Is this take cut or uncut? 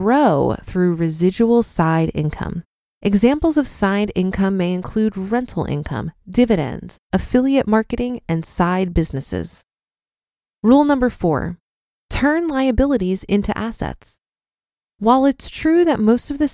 uncut